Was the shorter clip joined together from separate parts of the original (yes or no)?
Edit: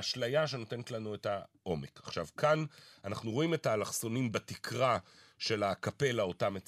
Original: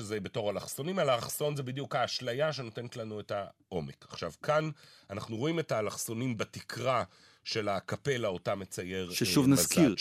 no